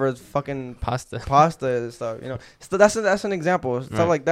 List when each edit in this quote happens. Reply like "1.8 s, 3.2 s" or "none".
none

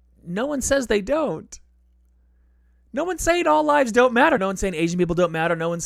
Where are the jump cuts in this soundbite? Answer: 4.4 s

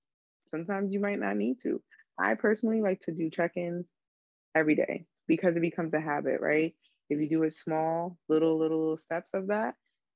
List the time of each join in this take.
none

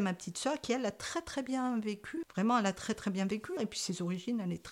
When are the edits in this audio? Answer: 2.2 s, 3.6 s

